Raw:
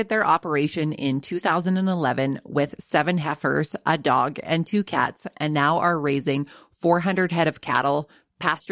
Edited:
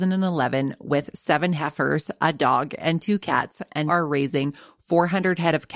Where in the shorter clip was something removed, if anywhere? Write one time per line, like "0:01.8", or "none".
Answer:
0:03.9